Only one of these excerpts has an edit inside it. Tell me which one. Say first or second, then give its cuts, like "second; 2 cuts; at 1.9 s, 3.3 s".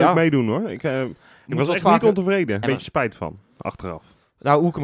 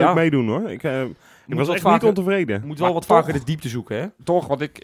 first; 1 cut; at 2.6 s